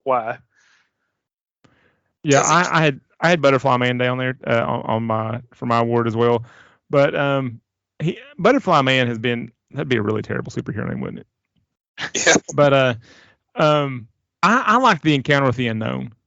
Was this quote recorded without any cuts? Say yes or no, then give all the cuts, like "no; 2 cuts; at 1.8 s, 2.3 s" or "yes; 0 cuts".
yes; 0 cuts